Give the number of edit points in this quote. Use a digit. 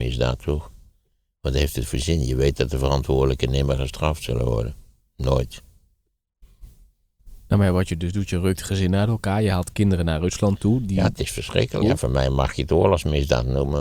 1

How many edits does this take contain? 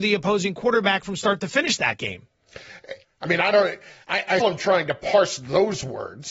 2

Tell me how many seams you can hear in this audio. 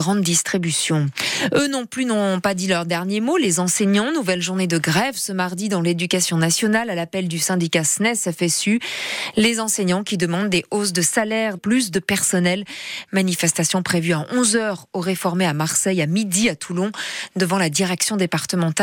1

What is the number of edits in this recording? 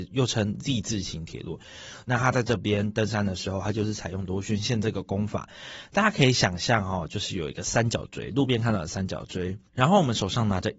1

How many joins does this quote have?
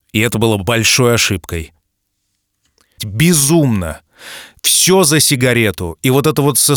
1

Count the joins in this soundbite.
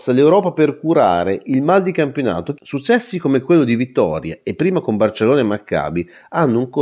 1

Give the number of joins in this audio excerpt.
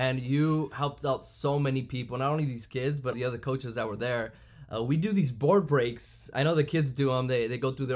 1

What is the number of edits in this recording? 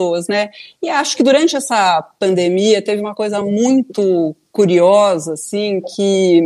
0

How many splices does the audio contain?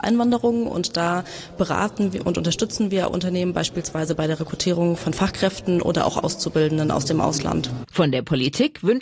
1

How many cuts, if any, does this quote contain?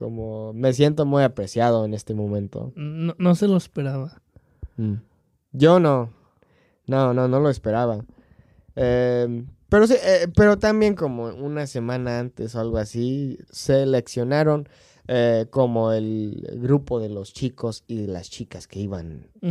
1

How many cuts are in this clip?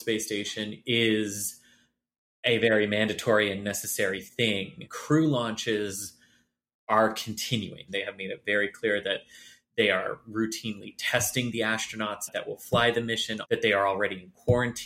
2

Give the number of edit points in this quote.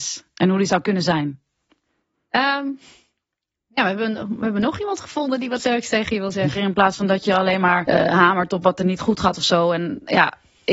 2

